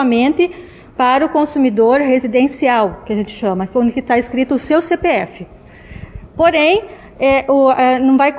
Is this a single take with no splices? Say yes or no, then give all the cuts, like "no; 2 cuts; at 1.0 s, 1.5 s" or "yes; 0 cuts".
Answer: yes; 0 cuts